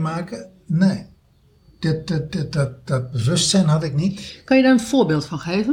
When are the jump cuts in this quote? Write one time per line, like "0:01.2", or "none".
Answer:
none